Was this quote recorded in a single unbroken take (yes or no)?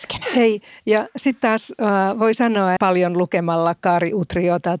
no